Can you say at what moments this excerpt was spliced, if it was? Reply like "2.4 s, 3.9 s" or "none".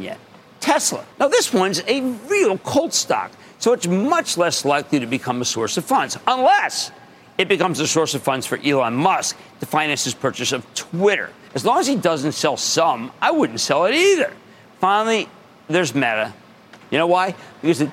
1.1 s, 11.5 s, 16.8 s